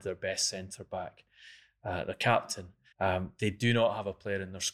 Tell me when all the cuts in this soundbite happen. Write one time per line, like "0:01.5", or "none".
0:02.9

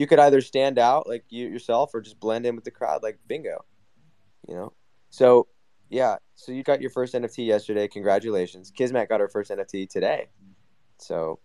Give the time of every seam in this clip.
0:06.6

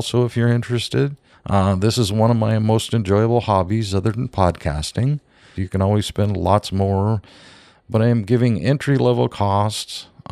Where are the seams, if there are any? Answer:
0:01.3
0:05.6

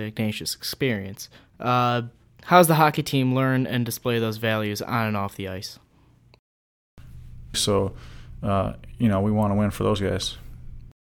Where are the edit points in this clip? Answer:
0:07.5

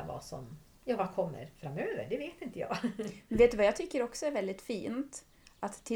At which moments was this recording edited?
none

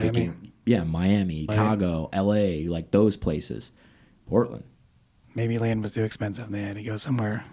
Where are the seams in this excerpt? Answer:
0:01.5

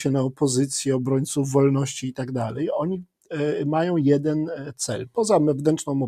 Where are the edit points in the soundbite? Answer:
none

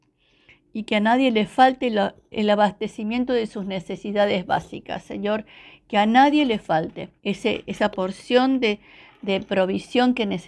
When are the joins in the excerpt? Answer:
0:02.3
0:07.2

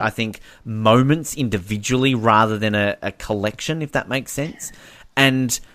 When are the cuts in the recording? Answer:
none

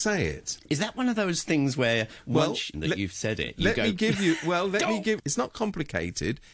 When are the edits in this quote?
0:02.7
0:05.2

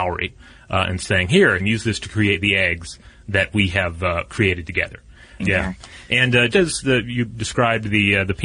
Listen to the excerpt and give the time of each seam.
0:01.6
0:05.4
0:06.5

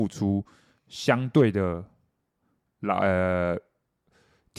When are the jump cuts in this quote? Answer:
none

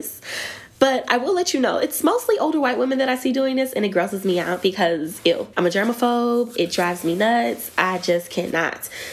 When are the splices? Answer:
0:05.5

